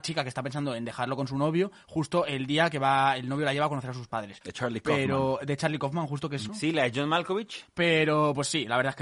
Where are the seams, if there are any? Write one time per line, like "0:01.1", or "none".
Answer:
0:04.4
0:06.5
0:07.7

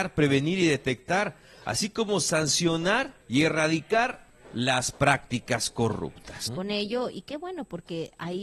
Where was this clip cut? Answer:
0:03.2
0:06.5

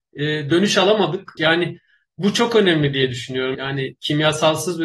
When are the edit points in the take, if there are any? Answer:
0:01.4
0:03.5

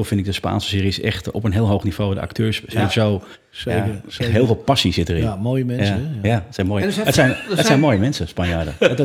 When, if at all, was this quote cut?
none

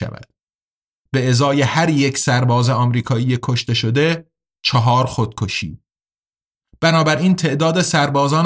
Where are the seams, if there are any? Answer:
0:01.1

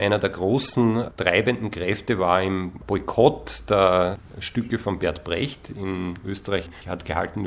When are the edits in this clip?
none

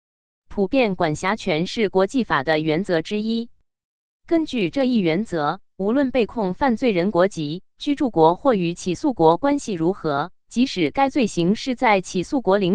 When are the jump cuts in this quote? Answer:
none

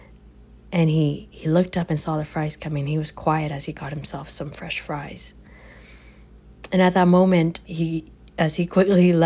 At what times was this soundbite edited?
0:07.6

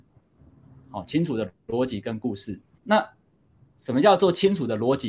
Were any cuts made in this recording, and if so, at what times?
0:02.8

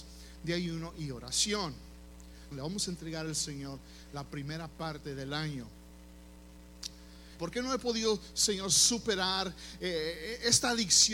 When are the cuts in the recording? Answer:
0:02.5
0:07.4

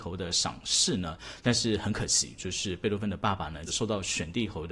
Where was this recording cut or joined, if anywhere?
0:01.4
0:03.7

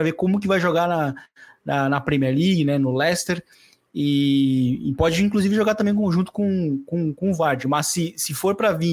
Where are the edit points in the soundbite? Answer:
none

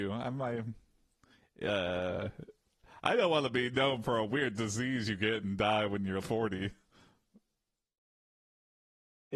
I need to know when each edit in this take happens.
0:06.2

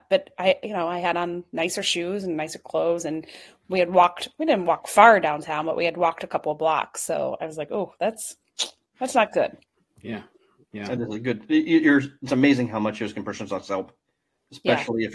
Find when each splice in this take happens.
none

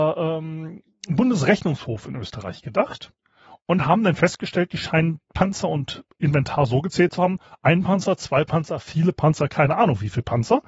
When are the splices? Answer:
none

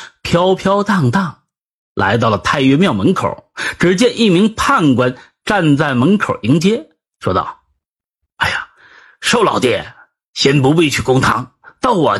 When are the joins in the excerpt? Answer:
none

